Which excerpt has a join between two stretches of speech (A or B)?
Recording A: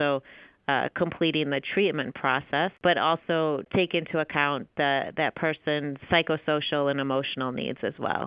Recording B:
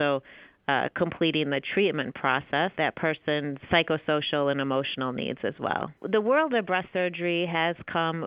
B